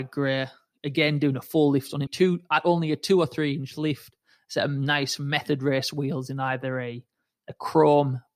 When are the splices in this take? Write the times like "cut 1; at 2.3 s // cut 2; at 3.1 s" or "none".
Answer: cut 1; at 2.1 s